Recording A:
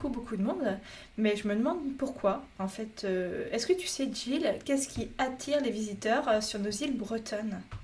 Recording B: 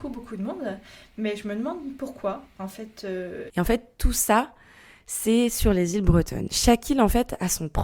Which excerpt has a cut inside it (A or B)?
B